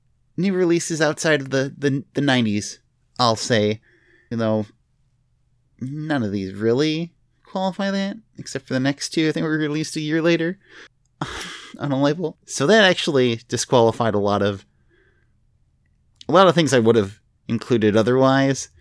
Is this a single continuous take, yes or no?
no